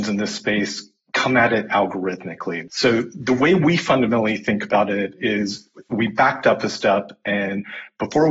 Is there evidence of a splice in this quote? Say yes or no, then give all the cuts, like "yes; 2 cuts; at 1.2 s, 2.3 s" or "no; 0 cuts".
yes; 1 cut; at 2.7 s